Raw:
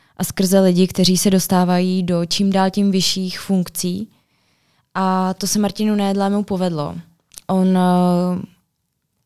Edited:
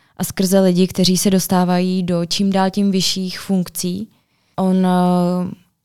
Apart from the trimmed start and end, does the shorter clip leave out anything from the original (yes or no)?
yes